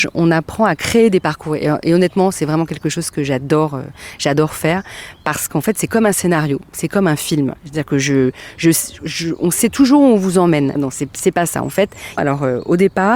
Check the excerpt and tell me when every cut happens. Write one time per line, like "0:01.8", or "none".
0:10.8
0:12.2